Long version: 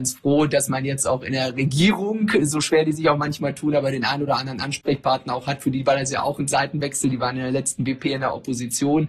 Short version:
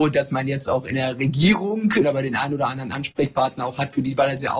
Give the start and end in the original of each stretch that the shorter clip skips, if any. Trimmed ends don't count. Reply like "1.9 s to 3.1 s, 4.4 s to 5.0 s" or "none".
2.4 s to 3.7 s